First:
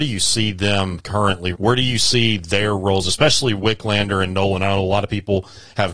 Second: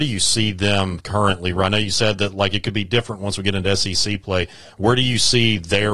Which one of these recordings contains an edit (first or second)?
first